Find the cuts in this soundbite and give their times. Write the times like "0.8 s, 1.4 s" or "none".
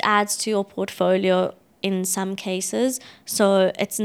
none